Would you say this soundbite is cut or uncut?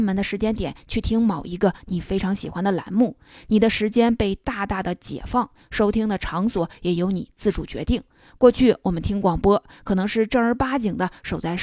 uncut